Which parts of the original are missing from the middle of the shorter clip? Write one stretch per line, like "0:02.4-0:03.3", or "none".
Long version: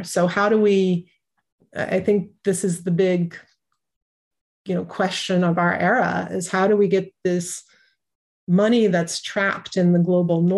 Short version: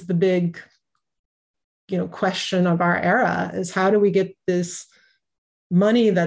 none